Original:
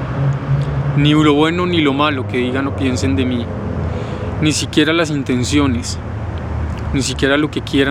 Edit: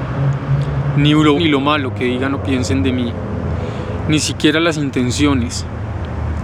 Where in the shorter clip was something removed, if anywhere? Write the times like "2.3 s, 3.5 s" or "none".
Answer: 1.4 s